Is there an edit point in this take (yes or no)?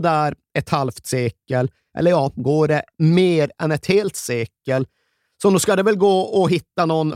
no